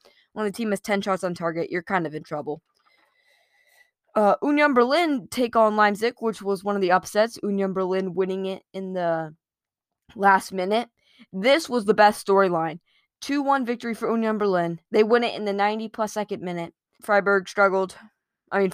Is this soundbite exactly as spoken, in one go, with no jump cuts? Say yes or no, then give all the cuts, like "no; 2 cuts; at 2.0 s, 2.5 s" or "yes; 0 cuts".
no; 1 cut; at 16.9 s